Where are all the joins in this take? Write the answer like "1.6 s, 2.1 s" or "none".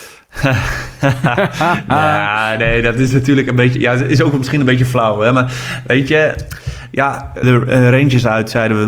7.4 s